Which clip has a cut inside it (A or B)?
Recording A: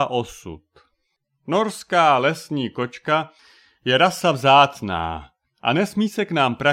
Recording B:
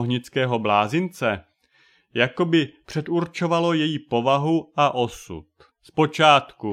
B